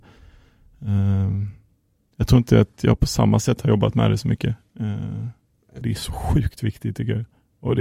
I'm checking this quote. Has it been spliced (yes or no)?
yes